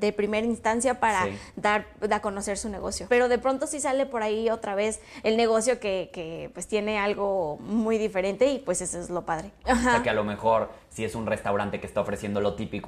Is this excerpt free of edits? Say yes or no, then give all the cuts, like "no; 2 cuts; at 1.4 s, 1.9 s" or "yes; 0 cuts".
no; 2 cuts; at 3.1 s, 9.6 s